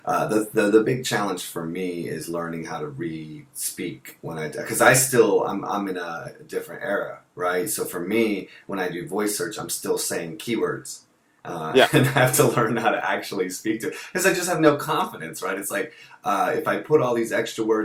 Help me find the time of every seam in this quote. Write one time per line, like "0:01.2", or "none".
none